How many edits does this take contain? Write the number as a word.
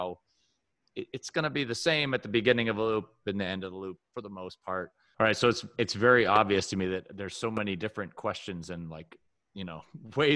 one